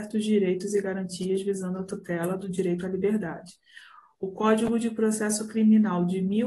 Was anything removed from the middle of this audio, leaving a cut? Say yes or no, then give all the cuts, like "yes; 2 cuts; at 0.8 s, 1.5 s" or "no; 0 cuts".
no; 0 cuts